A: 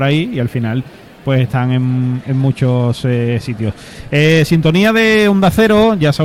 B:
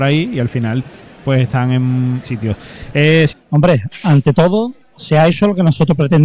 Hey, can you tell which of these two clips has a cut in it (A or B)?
B